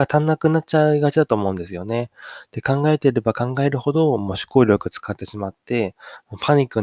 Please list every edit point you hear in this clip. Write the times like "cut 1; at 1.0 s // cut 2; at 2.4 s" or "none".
none

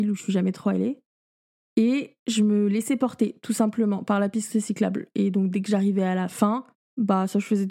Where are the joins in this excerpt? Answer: none

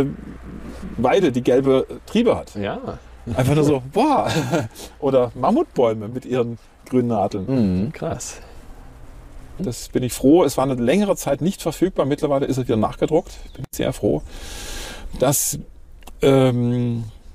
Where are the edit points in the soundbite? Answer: cut 1; at 7.9 s // cut 2; at 9.6 s

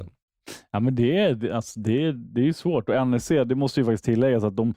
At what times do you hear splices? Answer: none

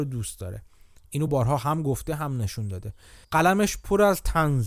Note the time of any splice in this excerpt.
cut 1; at 1.3 s // cut 2; at 3.2 s

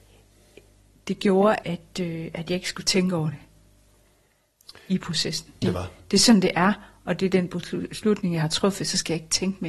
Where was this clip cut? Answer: cut 1; at 1.6 s // cut 2; at 5.6 s

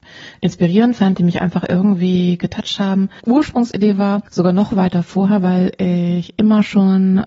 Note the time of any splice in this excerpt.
cut 1; at 3.2 s // cut 2; at 4.3 s

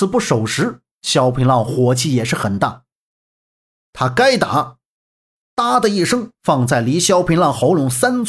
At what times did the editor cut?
cut 1; at 3.7 s // cut 2; at 5.4 s

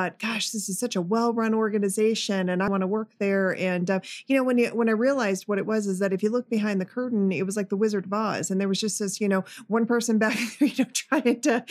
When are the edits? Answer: cut 1; at 2.7 s

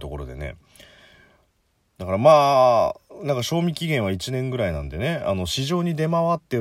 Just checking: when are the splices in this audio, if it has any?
none

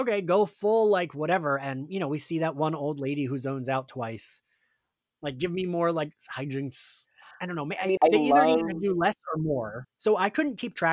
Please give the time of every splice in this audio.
cut 1; at 8.0 s // cut 2; at 9.8 s

